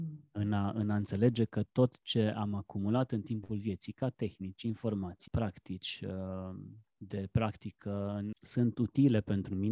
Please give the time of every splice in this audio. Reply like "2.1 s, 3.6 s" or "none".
5.3 s, 6.9 s, 8.3 s